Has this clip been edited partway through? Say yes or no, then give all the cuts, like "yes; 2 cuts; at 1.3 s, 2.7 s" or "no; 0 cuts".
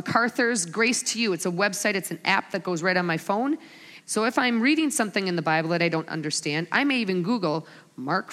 yes; 1 cut; at 4.0 s